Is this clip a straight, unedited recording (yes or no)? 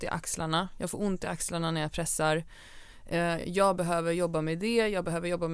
yes